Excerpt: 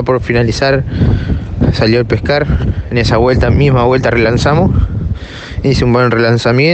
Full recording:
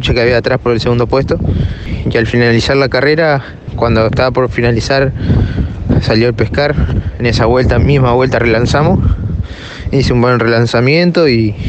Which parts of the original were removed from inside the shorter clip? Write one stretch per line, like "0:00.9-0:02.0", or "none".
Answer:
none